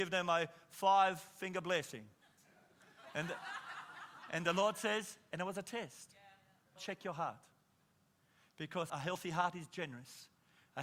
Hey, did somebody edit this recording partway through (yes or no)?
yes